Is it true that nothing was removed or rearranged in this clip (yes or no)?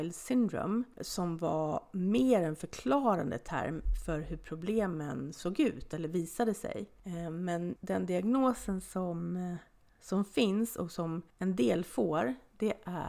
yes